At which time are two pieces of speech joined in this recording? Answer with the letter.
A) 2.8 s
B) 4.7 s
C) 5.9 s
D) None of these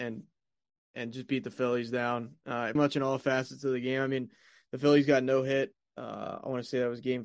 A